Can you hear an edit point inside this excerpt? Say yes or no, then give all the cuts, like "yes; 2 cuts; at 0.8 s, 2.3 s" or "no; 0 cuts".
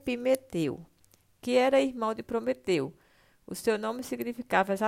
no; 0 cuts